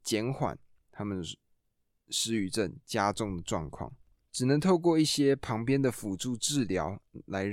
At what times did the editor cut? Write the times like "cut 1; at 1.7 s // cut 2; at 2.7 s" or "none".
cut 1; at 4.3 s